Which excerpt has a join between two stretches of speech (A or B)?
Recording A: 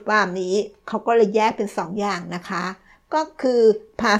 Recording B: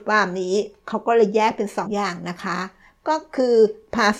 B